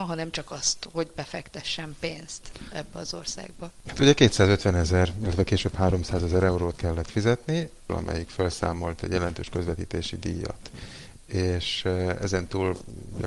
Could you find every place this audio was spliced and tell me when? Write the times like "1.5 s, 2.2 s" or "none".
3.8 s, 7.9 s